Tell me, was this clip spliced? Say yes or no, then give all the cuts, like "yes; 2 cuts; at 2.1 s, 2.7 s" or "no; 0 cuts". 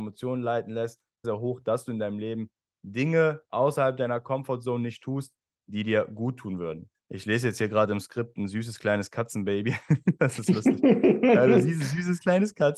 yes; 2 cuts; at 1.2 s, 6.9 s